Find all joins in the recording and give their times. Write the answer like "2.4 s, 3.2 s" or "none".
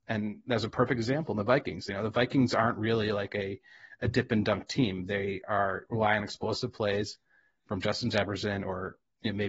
none